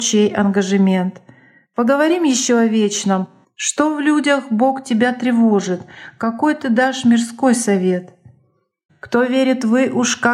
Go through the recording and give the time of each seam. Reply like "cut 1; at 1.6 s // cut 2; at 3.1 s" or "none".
cut 1; at 3.4 s // cut 2; at 8.9 s